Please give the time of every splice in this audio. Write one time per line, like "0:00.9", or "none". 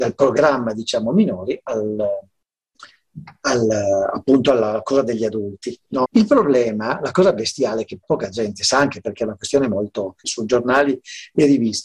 0:06.0
0:08.0
0:10.2